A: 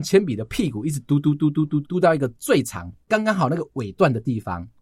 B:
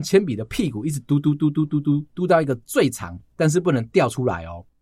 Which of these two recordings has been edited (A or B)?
A